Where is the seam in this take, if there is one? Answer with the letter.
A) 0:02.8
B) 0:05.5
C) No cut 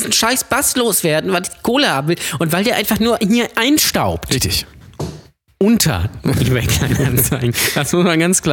B